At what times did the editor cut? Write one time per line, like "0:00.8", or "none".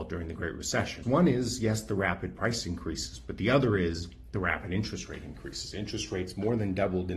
0:01.0